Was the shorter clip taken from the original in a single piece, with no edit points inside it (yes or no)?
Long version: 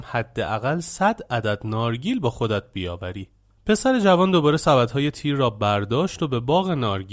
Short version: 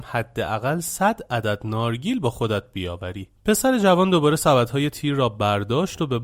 no